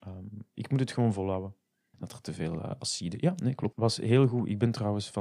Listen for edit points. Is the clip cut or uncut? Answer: cut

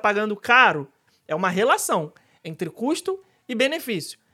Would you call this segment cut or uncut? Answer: cut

